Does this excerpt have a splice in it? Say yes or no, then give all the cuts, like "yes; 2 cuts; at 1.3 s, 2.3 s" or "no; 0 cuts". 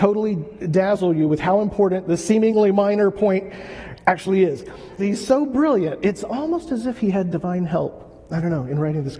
yes; 1 cut; at 5.0 s